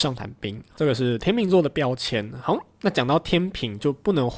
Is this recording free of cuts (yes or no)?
yes